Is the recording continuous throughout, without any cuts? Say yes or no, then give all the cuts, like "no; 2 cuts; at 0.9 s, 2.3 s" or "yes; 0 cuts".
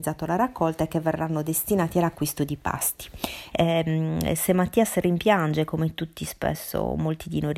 no; 1 cut; at 3.5 s